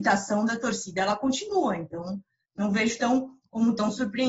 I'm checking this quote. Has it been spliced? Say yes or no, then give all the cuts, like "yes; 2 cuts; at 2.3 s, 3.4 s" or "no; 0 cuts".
no; 0 cuts